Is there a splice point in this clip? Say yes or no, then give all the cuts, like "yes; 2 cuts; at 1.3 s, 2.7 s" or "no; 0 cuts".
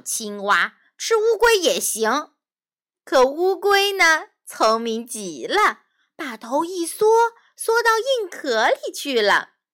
no; 0 cuts